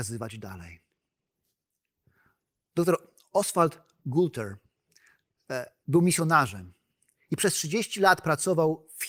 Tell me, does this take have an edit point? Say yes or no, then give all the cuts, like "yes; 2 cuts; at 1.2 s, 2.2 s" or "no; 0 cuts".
no; 0 cuts